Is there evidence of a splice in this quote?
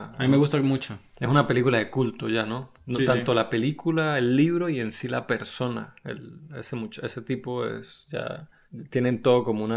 no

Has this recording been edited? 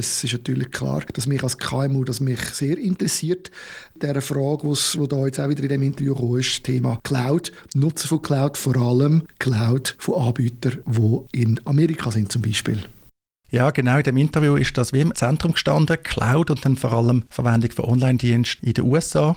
no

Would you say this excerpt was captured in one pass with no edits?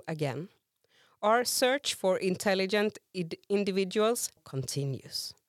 no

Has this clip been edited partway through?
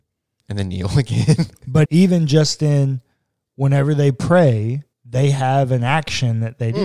yes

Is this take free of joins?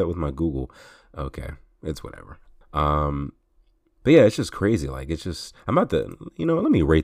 no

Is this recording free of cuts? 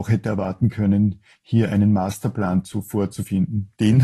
yes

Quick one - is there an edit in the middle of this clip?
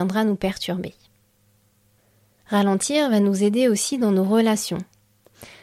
yes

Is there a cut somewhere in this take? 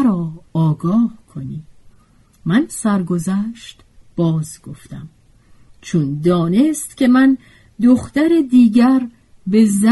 no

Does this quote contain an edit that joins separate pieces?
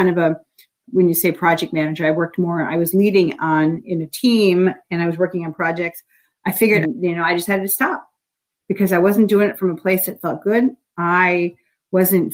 yes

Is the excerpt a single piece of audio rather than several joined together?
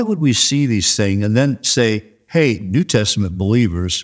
yes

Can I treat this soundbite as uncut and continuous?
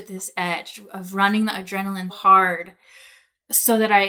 no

